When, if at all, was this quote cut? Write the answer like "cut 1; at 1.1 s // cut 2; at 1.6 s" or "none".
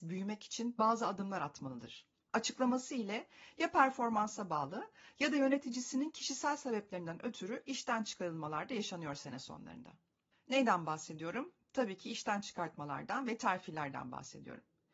cut 1; at 2.3 s // cut 2; at 10.3 s